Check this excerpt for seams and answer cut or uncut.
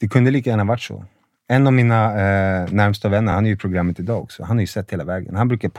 uncut